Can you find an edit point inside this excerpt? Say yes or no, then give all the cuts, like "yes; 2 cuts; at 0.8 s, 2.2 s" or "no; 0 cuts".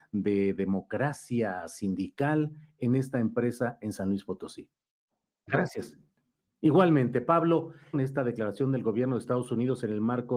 yes; 2 cuts; at 5.5 s, 7.9 s